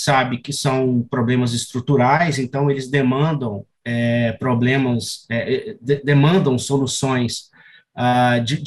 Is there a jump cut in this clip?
no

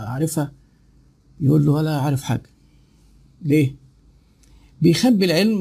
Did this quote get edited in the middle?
no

